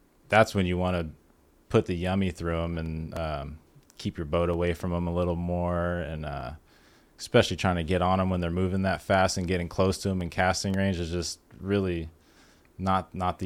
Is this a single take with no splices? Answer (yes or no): yes